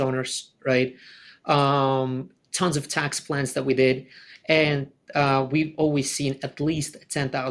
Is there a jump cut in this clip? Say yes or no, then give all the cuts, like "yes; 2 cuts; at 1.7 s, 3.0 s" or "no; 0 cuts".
no; 0 cuts